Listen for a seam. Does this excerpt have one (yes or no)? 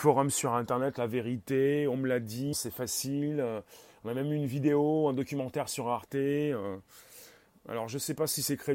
yes